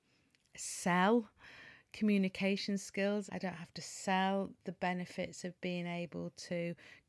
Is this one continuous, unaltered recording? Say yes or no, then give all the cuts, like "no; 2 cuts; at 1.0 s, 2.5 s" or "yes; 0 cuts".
no; 1 cut; at 3.3 s